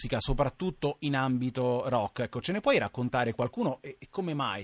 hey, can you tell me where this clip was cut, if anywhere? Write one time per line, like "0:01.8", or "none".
none